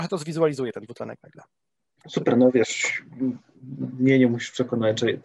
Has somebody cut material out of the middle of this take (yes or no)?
yes